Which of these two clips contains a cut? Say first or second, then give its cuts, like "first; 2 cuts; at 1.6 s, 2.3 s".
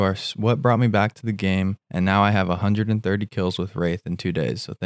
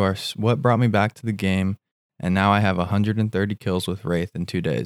first; 1 cut; at 1.8 s